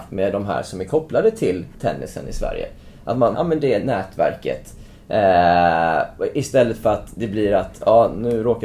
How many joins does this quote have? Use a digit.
1